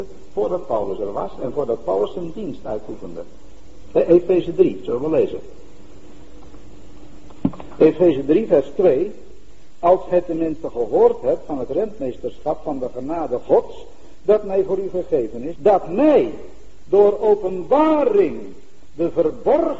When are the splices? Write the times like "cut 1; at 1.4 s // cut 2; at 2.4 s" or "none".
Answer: cut 1; at 3.9 s // cut 2; at 15.6 s